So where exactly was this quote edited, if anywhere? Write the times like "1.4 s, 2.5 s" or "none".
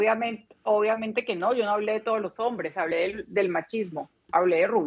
none